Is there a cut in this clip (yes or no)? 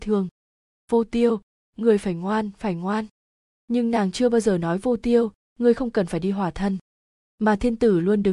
no